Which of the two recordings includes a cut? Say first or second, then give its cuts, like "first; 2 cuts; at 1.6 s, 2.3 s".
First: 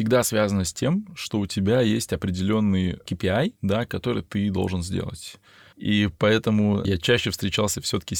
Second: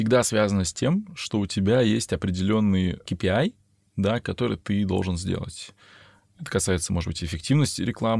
first; 3 cuts; at 3.6 s, 5.7 s, 6.8 s